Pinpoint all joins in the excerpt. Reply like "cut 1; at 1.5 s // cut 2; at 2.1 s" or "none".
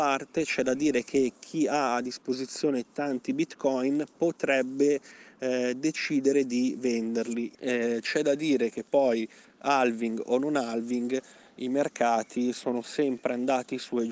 cut 1; at 7.5 s